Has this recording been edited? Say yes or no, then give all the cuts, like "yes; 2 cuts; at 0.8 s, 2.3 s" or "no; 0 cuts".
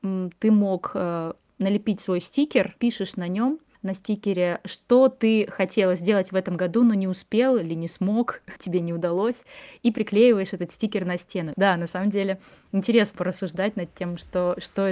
yes; 3 cuts; at 8.6 s, 11.5 s, 13.1 s